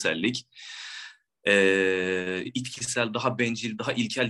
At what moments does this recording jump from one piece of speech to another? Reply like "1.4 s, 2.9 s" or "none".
2.4 s